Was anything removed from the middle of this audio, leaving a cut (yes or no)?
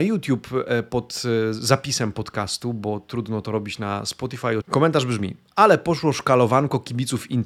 yes